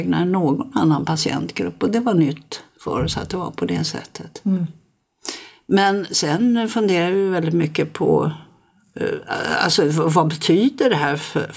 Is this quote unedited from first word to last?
yes; 0 cuts

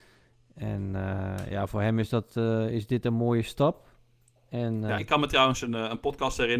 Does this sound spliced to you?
yes; 1 cut; at 5.0 s

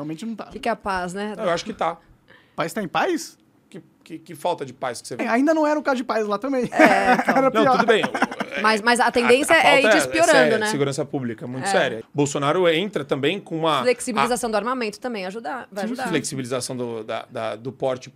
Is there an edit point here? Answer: yes; 2 cuts; at 5.2 s, 12.0 s

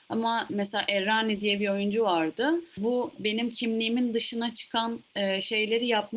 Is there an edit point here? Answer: yes; 1 cut; at 2.7 s

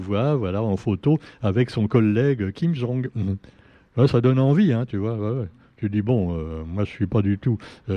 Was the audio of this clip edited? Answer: no; 0 cuts

